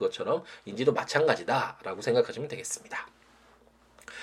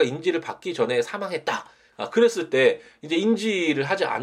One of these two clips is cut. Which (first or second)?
second